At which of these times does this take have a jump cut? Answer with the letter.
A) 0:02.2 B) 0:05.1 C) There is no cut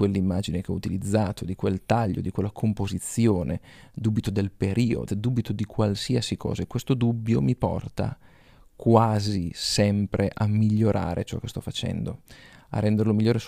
B